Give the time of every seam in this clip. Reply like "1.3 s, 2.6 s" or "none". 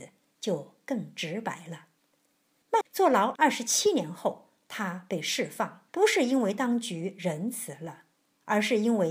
2.8 s, 5.9 s